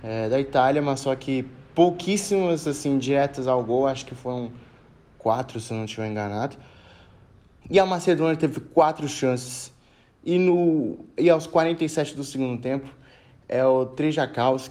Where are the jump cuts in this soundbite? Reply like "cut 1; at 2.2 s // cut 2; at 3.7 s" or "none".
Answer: cut 1; at 7.6 s